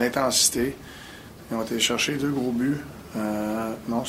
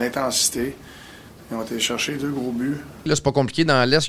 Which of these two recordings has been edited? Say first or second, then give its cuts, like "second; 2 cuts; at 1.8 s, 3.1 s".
second; 1 cut; at 3.1 s